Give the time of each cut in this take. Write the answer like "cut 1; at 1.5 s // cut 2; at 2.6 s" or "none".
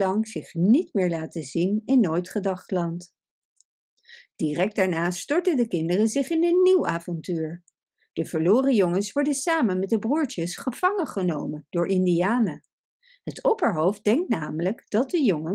none